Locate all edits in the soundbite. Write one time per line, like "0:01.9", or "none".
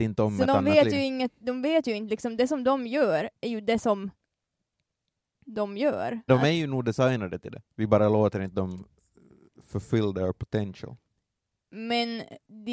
0:06.3